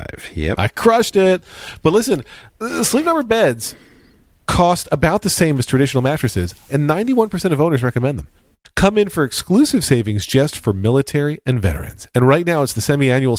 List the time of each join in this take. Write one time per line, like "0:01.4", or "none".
0:06.7